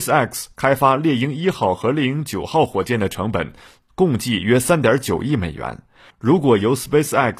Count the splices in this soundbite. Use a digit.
0